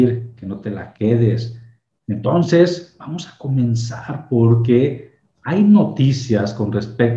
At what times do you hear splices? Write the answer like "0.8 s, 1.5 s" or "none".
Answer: 2.0 s